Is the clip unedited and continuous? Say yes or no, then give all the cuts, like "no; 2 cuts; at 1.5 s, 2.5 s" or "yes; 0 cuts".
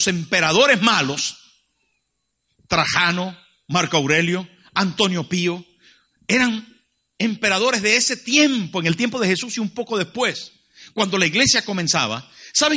yes; 0 cuts